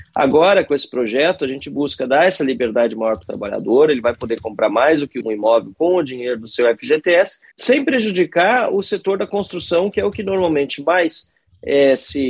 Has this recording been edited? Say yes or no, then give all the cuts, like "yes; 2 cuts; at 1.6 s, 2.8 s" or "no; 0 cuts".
yes; 1 cut; at 7.5 s